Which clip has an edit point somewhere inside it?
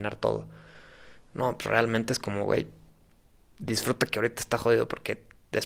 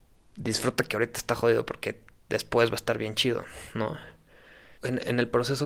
second; 1 cut; at 4.8 s

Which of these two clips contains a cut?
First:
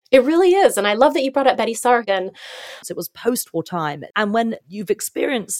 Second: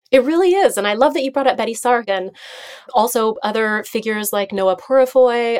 first; 2 cuts; at 2.8 s, 4.1 s

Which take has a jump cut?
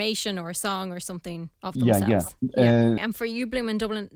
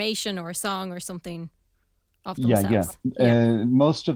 first; 2 cuts; at 1.5 s, 3.0 s

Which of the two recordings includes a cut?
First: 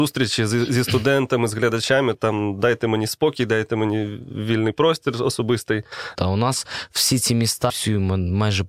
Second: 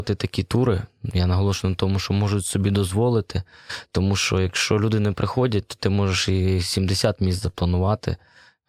first; 3 cuts; at 2.1 s, 6.1 s, 7.7 s

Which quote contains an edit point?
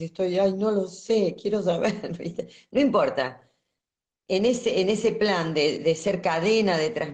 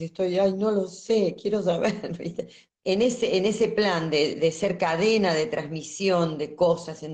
second; 1 cut; at 2.7 s

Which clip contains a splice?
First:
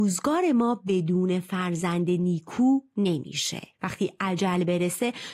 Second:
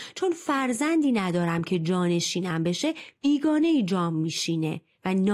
first; 1 cut; at 3.7 s

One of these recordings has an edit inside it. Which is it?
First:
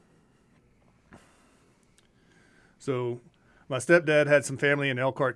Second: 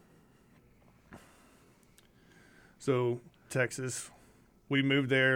second; 1 cut; at 3.5 s

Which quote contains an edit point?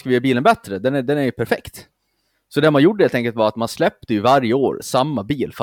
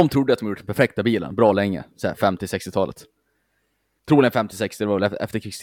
second; 1 cut; at 4.0 s

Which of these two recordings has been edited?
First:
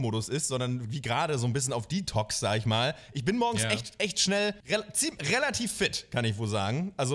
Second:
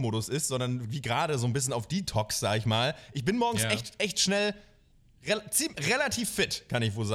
first; 1 cut; at 4.6 s

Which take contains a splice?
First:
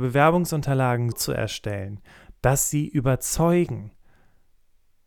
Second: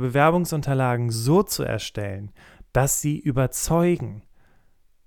first; 1 cut; at 1.1 s

